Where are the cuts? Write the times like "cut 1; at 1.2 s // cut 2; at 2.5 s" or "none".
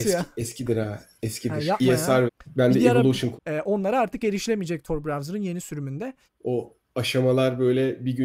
cut 1; at 2.3 s // cut 2; at 3.4 s // cut 3; at 6.3 s

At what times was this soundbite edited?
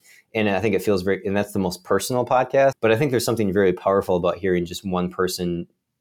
cut 1; at 2.7 s

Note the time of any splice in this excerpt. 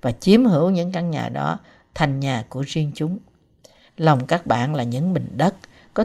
cut 1; at 3.9 s

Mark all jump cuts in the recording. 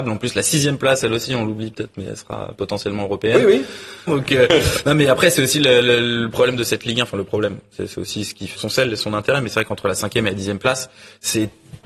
cut 1; at 4.1 s // cut 2; at 8.5 s

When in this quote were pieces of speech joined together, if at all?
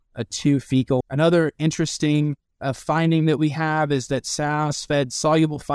cut 1; at 1.0 s

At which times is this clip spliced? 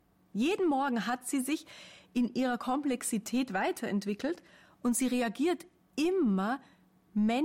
none

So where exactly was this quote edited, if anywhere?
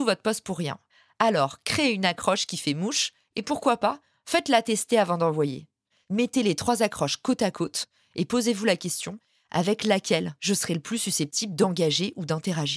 cut 1; at 5.9 s

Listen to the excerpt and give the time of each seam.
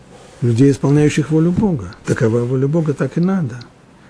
none

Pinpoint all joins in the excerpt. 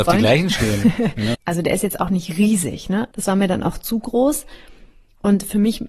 cut 1; at 1.3 s // cut 2; at 3.1 s

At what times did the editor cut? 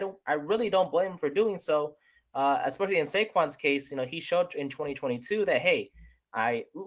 none

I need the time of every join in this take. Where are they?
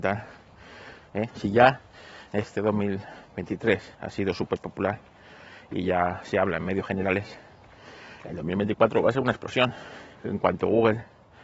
cut 1; at 1.3 s

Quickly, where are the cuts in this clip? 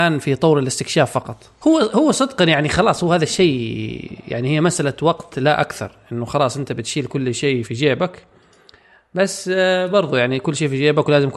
cut 1; at 1.6 s // cut 2; at 7.6 s

